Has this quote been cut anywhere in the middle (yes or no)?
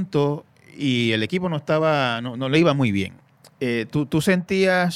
no